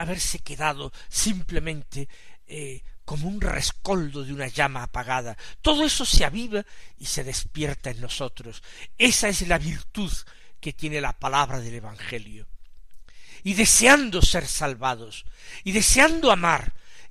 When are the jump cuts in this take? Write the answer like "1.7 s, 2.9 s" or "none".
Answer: none